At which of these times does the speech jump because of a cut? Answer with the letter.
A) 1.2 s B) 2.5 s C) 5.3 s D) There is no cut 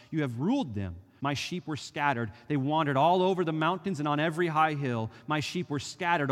A